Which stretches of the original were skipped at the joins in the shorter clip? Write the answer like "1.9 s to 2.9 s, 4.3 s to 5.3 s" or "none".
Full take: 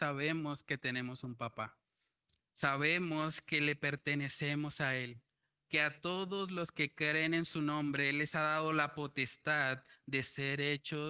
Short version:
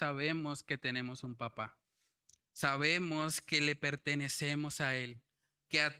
none